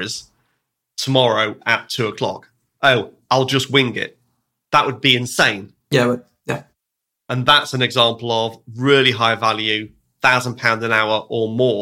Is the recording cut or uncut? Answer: uncut